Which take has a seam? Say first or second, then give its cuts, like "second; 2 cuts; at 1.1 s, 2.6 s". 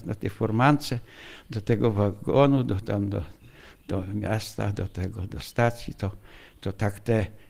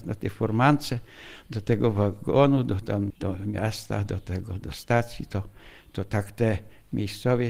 second; 1 cut; at 3.1 s